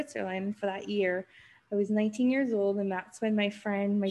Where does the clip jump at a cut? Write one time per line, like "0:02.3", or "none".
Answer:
none